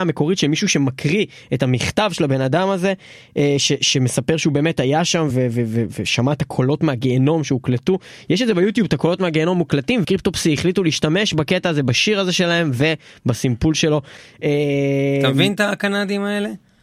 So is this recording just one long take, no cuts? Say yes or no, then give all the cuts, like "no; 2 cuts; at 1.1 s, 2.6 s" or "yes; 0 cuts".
no; 2 cuts; at 5.3 s, 10.0 s